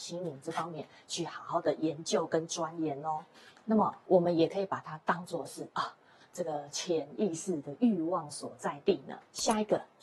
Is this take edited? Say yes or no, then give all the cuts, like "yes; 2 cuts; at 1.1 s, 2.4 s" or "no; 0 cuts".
no; 0 cuts